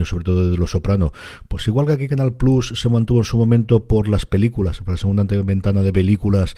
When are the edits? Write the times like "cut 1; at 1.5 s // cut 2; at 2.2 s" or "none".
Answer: none